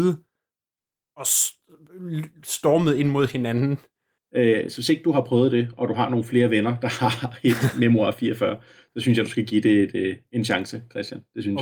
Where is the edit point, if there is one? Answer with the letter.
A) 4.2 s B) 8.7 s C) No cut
A